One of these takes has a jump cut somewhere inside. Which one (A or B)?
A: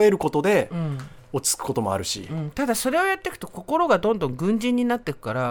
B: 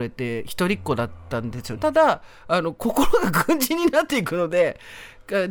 B